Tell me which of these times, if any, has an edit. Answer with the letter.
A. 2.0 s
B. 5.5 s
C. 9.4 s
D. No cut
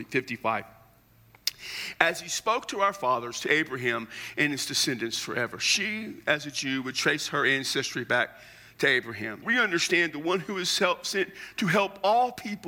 C